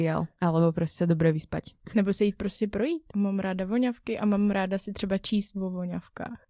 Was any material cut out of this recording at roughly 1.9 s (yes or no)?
no